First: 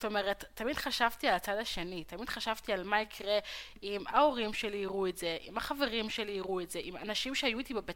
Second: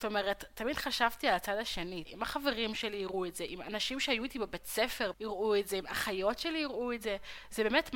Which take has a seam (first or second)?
second